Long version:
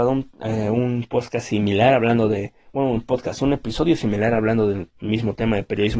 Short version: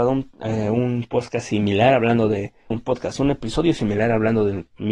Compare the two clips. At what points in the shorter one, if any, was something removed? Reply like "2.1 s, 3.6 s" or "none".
2.7 s